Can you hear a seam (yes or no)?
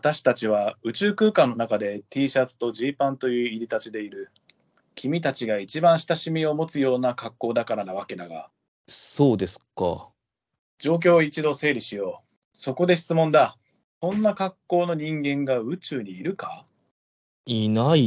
yes